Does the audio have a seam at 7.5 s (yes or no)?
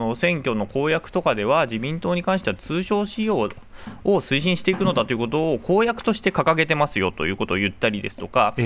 no